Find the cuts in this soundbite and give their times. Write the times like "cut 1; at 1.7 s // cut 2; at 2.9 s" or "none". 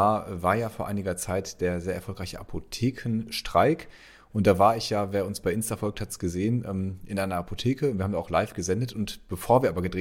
none